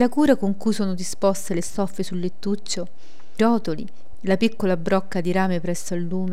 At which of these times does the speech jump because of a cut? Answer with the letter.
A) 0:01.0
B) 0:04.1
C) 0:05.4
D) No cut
B